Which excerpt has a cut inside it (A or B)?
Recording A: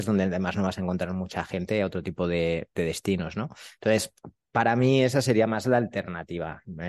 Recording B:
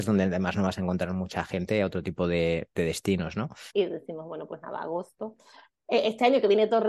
B